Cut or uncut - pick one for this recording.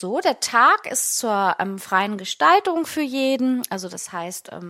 uncut